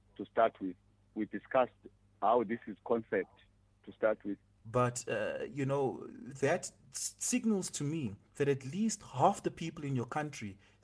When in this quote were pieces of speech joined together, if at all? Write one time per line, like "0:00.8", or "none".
0:04.6
0:08.3